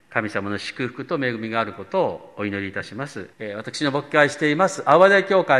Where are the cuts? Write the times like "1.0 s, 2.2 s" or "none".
3.3 s